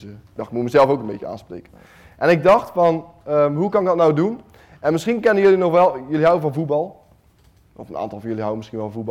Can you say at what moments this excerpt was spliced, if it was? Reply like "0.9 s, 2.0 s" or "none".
none